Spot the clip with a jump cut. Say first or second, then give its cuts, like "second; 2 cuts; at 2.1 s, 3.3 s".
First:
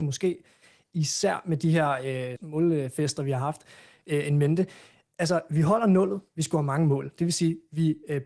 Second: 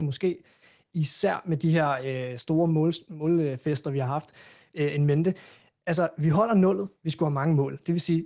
first; 1 cut; at 2.4 s